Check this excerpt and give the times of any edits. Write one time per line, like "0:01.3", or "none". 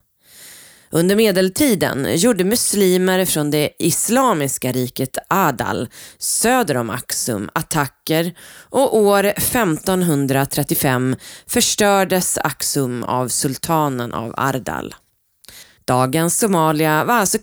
0:15.8